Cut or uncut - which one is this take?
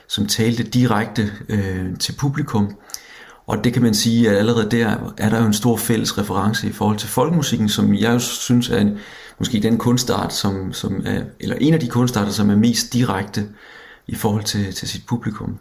uncut